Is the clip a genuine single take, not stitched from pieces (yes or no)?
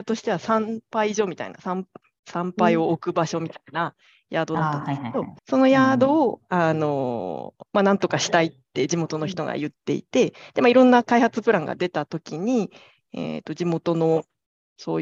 no